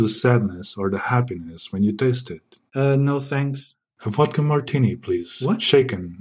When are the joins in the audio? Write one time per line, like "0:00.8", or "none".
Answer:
0:02.7